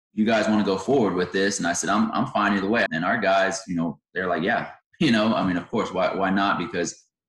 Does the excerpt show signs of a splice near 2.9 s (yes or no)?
yes